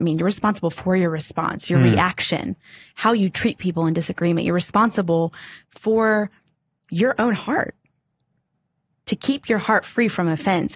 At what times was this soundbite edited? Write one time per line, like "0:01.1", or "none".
none